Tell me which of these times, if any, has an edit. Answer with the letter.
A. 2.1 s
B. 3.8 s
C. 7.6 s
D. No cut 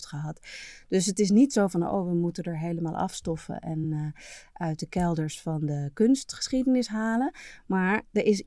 D